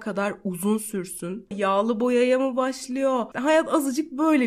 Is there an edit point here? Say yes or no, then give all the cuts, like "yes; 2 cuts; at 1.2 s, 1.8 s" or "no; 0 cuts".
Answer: yes; 2 cuts; at 1.5 s, 3.3 s